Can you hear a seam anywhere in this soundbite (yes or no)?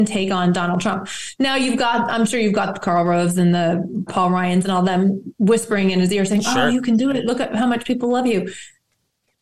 yes